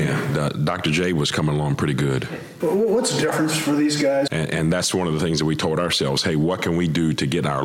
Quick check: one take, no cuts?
no; 2 cuts; at 2.6 s, 4.3 s

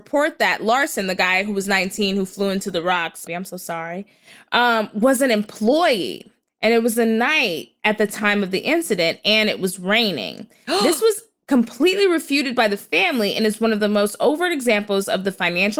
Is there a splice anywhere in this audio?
yes; 1 cut; at 3.3 s

